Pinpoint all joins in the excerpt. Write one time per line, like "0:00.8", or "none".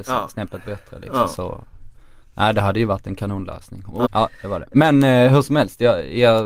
0:04.0